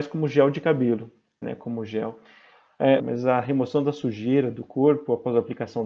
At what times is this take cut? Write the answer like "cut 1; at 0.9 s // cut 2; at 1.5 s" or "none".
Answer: cut 1; at 1.4 s // cut 2; at 3.0 s